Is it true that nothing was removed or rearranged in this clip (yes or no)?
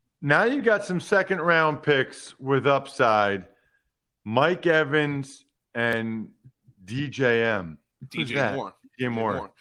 no